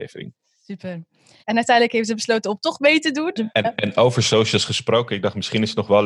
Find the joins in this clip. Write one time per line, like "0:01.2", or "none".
0:01.4
0:03.4

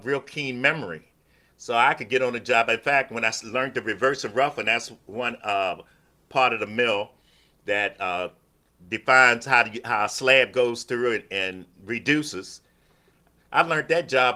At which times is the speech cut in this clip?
none

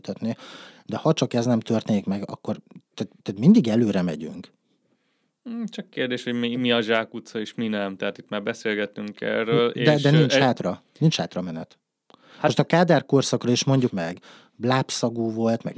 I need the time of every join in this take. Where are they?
0:03.2
0:13.9

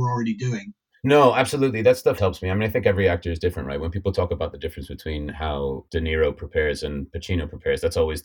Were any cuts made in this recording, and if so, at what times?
0:02.2
0:05.9

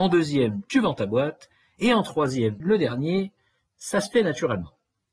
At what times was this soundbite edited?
0:02.6

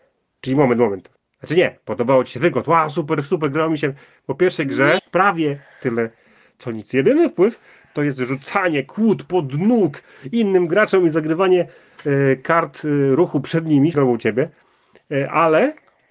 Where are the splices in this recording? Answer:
0:01.2
0:05.0
0:13.9

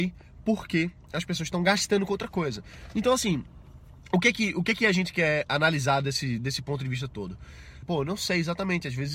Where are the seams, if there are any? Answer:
0:07.8

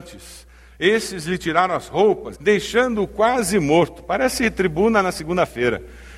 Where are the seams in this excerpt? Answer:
0:02.3

